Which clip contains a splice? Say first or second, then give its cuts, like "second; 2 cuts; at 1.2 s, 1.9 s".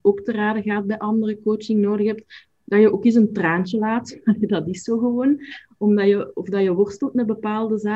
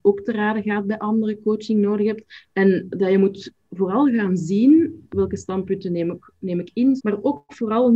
second; 3 cuts; at 2.5 s, 5.1 s, 7.0 s